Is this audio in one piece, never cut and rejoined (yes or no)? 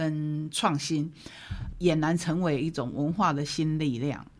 no